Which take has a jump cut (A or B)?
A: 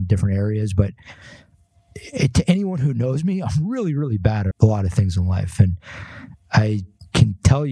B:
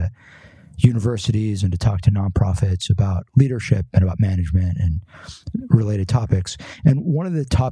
A